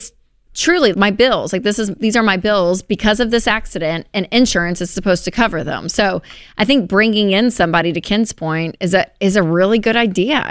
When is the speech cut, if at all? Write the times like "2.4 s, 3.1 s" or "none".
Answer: 0.9 s